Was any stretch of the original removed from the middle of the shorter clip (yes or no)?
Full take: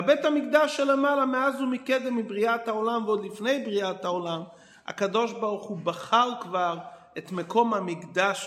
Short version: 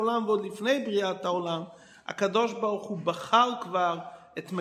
no